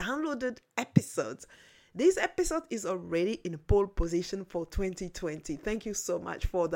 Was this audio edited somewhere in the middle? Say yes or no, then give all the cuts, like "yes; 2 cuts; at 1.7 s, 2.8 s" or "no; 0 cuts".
no; 0 cuts